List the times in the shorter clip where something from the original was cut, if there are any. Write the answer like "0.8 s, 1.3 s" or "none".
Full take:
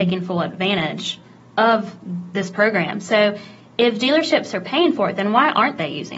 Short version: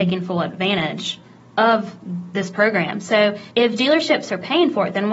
3.5 s